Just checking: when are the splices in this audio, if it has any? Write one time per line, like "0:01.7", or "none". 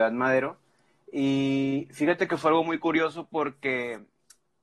none